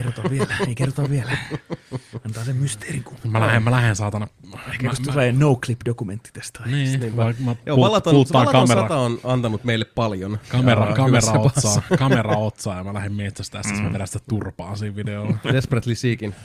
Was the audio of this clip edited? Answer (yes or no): no